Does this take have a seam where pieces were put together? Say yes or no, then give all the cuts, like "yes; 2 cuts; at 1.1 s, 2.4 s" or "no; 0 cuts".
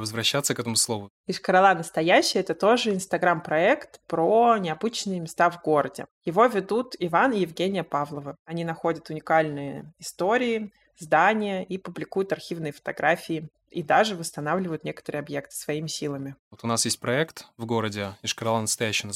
yes; 1 cut; at 16.4 s